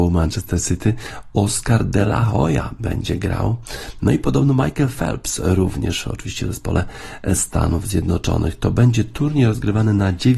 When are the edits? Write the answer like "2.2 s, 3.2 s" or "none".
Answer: none